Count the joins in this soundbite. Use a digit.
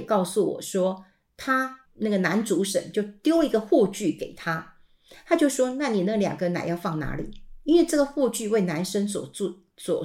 1